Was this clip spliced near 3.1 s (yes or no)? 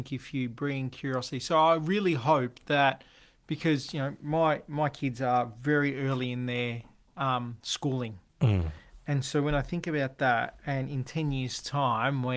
no